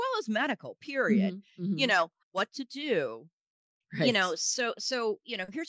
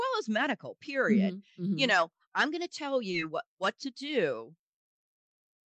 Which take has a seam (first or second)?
first